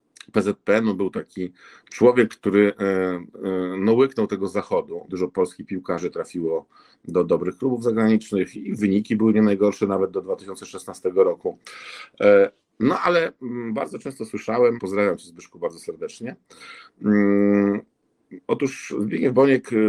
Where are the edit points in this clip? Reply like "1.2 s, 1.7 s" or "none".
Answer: 5.1 s, 14.8 s